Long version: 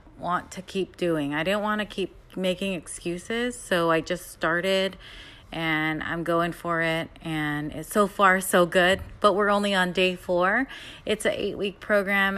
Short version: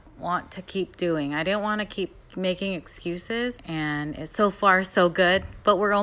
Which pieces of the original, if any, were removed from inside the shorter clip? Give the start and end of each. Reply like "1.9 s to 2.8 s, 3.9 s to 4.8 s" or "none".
3.6 s to 7.1 s